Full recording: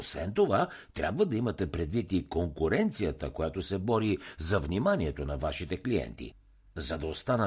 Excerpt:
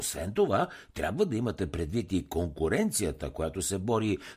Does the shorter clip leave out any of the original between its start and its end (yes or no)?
no